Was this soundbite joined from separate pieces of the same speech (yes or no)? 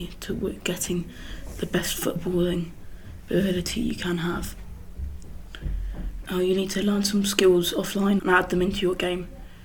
yes